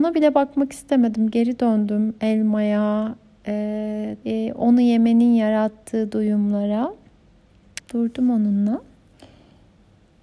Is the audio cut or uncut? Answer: cut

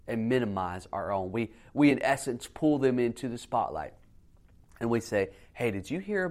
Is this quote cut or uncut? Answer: uncut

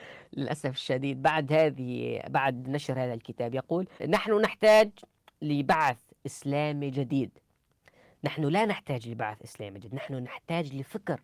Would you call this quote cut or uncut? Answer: cut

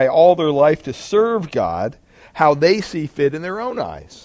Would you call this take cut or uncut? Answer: uncut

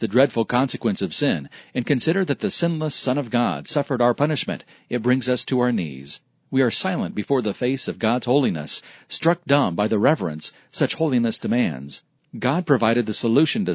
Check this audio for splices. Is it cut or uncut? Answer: cut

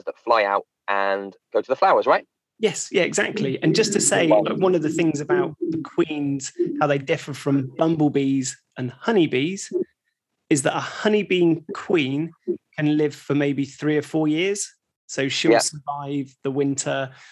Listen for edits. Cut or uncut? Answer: uncut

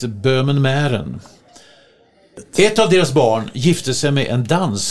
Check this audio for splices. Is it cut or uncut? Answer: cut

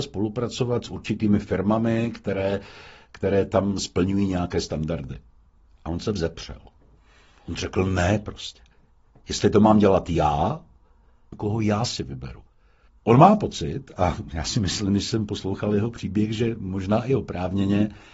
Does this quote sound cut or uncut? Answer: cut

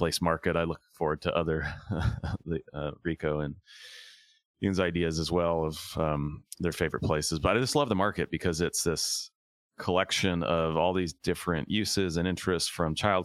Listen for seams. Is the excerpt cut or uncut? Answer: uncut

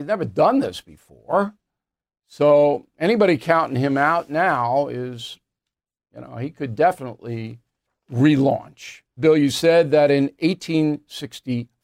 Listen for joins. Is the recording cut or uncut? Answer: cut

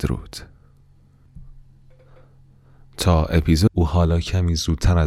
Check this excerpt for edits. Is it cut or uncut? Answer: uncut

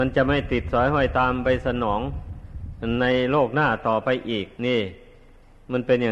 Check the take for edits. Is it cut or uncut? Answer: cut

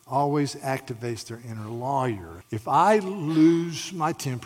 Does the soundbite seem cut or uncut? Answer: cut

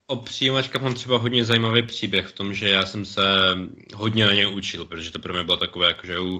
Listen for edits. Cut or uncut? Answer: uncut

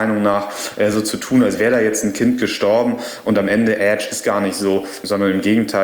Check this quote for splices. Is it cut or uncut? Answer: uncut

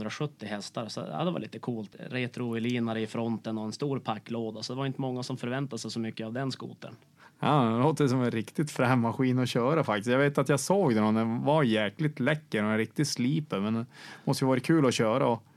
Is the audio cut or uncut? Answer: uncut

